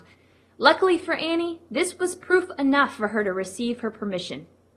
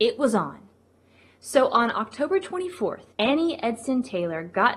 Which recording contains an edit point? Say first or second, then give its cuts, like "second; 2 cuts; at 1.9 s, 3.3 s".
second; 1 cut; at 3.1 s